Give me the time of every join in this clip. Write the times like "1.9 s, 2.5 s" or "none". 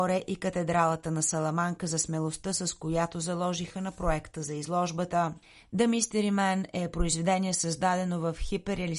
none